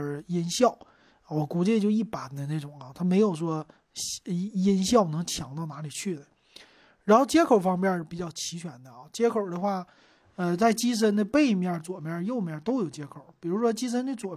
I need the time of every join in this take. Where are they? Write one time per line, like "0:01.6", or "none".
none

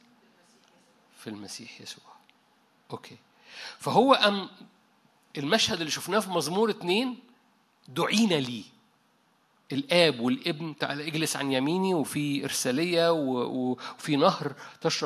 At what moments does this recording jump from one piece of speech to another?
none

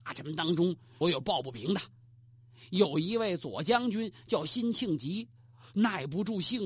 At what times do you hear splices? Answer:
0:01.0

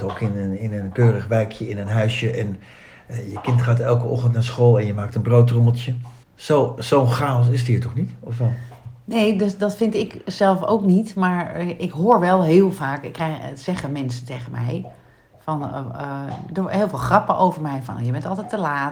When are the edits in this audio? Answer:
0:06.2

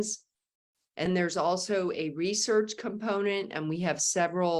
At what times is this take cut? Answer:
0:01.1

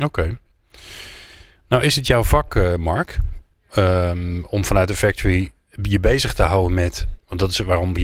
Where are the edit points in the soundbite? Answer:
none

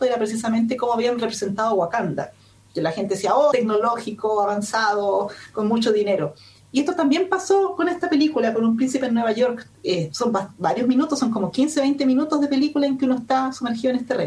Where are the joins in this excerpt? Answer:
0:03.5

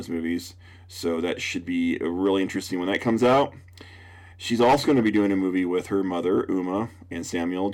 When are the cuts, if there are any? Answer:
none

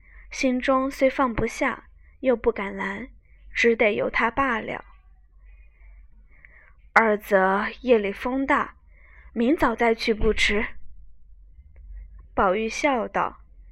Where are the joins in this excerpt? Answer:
0:06.1
0:12.2

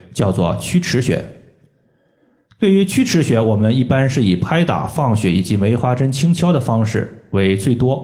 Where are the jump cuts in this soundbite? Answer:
none

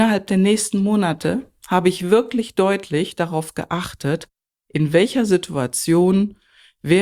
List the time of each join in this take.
none

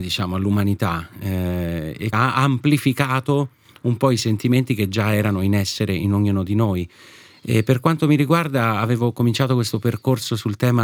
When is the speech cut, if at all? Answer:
0:02.1

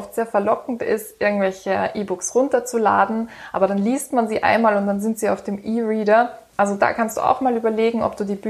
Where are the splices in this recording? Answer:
0:06.5

